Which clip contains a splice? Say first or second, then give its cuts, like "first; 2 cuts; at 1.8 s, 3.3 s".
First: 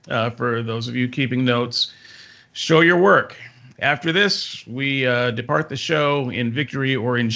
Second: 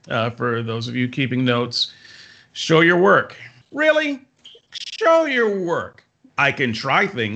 second; 2 cuts; at 3.6 s, 6.3 s